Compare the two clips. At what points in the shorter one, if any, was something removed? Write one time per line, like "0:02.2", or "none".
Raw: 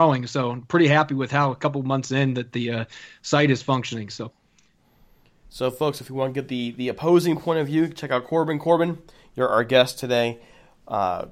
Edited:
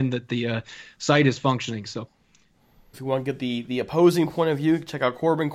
0:02.9